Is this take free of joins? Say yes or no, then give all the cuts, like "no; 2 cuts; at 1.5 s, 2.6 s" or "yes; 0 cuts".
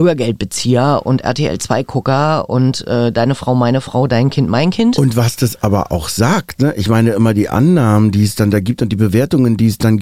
yes; 0 cuts